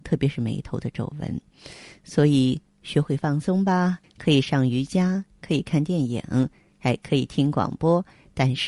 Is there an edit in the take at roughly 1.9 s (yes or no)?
no